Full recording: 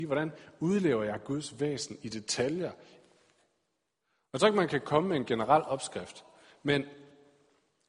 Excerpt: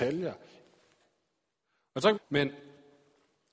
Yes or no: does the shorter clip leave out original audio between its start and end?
yes